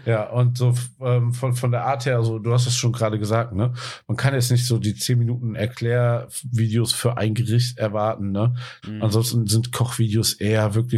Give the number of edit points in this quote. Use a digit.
1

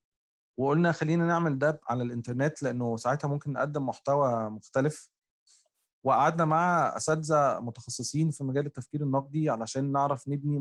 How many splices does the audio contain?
1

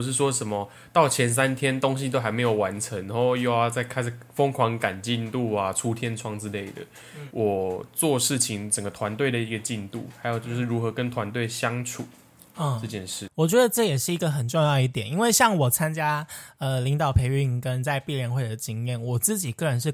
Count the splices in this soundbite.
2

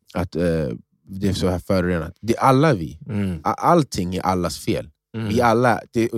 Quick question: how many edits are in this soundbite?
0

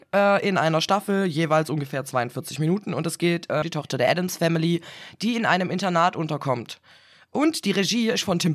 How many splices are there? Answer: 1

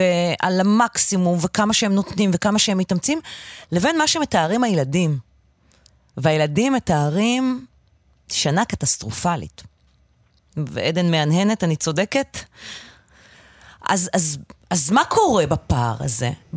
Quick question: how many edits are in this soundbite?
0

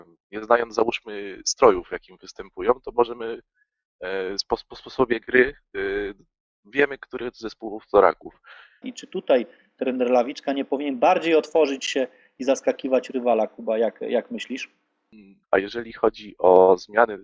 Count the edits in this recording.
2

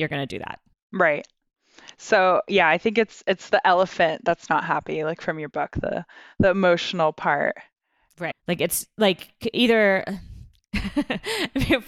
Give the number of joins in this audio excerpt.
1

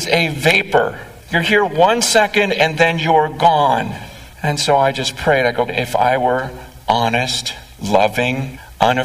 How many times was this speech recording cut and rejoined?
2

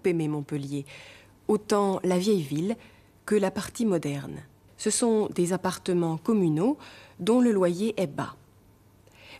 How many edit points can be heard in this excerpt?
1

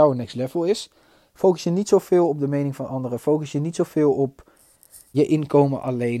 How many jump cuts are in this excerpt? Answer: 1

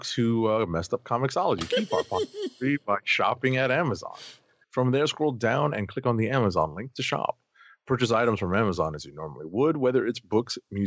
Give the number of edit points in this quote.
1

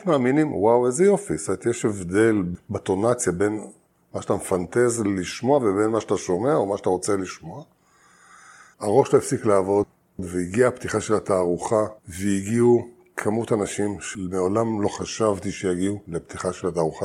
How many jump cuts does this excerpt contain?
2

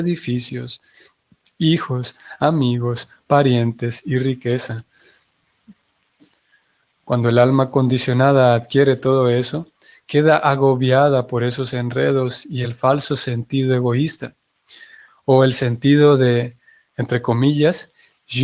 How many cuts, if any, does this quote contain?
0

